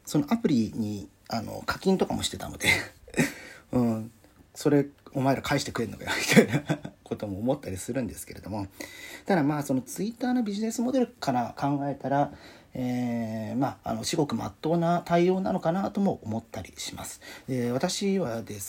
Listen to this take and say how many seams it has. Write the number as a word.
two